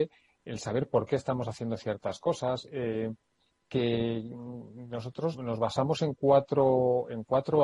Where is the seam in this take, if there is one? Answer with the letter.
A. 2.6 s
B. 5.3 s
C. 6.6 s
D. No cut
B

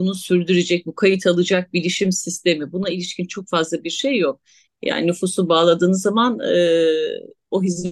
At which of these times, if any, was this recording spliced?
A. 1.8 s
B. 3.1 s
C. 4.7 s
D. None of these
C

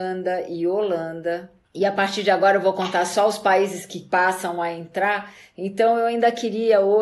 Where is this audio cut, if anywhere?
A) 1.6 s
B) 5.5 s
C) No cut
A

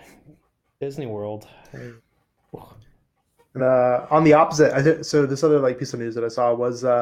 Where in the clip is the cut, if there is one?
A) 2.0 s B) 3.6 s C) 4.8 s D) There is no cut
B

